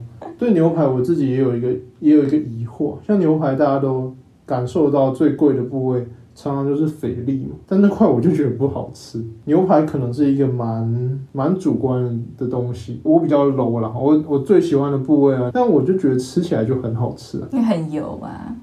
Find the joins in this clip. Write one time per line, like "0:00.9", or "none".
0:13.1
0:15.5